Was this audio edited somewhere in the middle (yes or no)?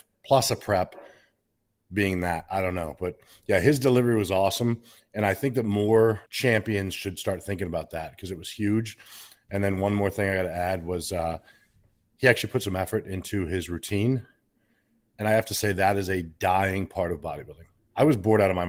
yes